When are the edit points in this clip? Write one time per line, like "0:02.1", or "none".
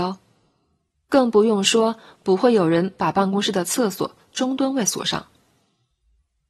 0:00.9